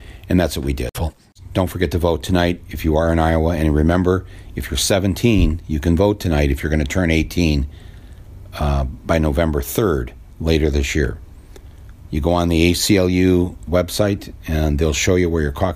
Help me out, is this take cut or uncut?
cut